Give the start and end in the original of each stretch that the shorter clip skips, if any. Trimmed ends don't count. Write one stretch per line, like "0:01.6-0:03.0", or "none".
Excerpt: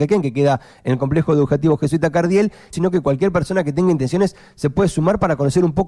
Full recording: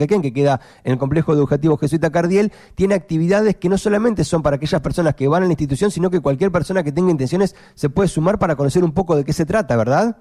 0:02.7-0:05.9

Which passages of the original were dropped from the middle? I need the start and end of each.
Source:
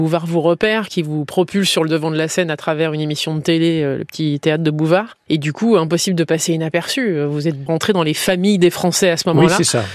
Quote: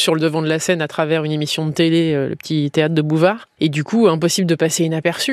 none

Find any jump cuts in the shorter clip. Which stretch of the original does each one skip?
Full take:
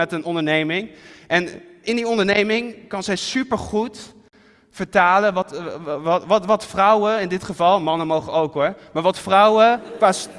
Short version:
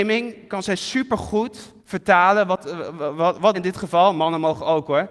0:04.2-0:04.7
0:06.4-0:07.2

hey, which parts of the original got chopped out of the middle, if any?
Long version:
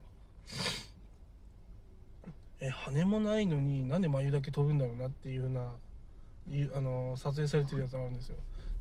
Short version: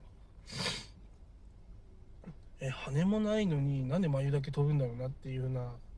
none

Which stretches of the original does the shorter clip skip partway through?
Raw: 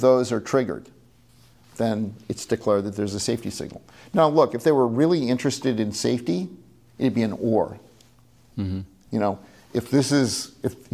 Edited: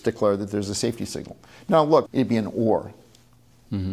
0:04.5-0:06.9

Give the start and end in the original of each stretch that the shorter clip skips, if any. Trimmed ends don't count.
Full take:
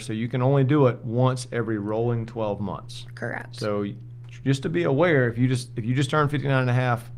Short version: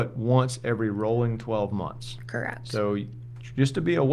none

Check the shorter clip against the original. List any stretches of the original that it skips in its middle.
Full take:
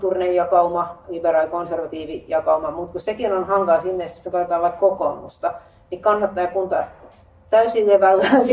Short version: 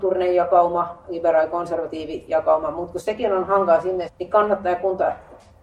0:04.1-0:05.8

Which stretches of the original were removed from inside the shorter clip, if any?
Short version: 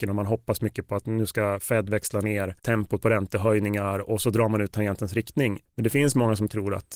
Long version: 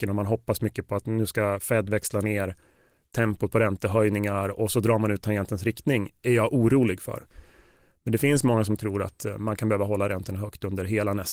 0:02.6-0:03.1
0:06.2-0:07.9

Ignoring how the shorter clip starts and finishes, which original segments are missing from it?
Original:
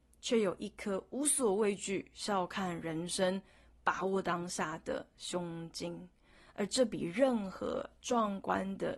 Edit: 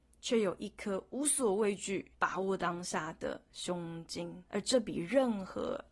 0:02.1-0:03.8
0:06.1-0:06.5

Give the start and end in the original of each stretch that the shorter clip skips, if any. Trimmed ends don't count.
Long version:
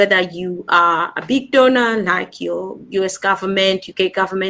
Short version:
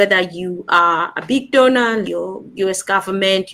0:02.0-0:02.4

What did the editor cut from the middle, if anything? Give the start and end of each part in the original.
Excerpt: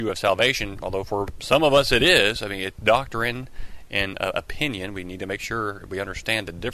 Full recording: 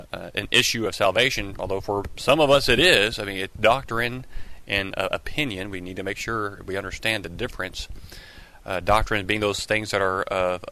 none

